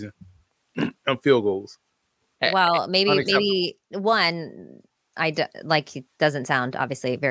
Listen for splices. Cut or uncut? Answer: uncut